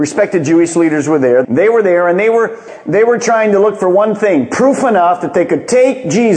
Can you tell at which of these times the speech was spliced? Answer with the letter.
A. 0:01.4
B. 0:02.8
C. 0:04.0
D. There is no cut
A